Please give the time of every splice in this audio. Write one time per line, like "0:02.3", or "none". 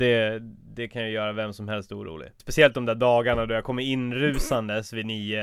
0:02.4